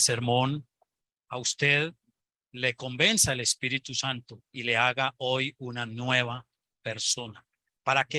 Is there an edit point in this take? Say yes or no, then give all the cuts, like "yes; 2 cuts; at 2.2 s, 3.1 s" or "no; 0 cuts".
yes; 2 cuts; at 1.2 s, 4.5 s